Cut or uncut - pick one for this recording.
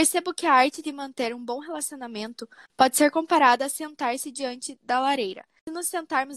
uncut